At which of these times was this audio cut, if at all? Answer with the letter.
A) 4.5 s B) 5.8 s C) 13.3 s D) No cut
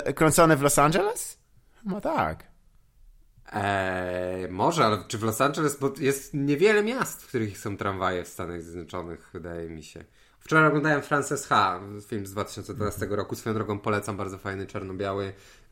D